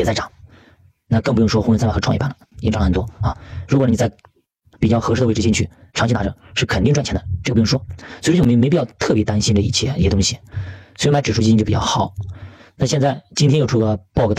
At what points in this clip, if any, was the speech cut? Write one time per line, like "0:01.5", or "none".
none